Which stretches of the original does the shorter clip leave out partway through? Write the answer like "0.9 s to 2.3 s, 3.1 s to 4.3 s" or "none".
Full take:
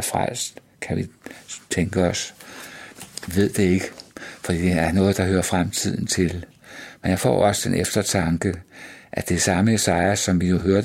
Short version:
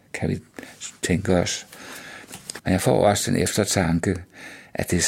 3.3 s to 7.0 s